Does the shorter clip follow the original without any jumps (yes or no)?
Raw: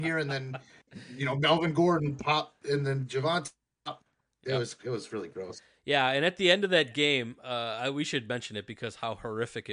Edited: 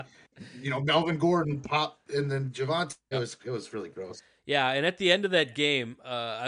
no